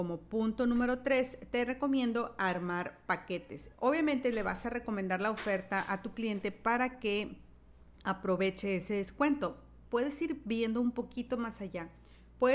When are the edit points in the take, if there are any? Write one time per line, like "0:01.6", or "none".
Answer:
0:03.7
0:09.8